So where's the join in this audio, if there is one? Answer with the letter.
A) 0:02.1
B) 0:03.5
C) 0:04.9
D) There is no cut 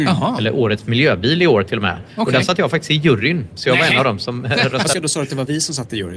C